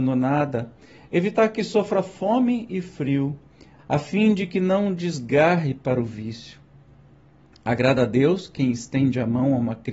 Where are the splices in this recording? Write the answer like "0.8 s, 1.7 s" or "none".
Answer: 3.8 s